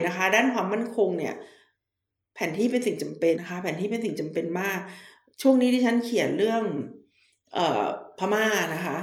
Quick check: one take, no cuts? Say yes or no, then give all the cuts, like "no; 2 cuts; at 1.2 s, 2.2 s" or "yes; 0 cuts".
no; 1 cut; at 3.3 s